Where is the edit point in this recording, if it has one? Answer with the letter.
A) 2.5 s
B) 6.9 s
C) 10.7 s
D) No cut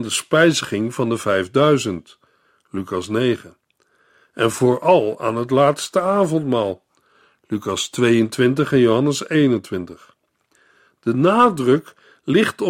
D